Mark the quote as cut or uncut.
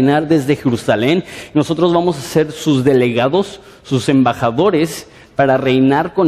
uncut